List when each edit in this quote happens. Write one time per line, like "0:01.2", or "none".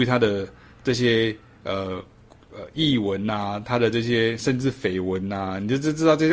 none